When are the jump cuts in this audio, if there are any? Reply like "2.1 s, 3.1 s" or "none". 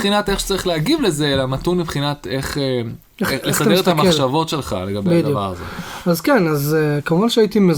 none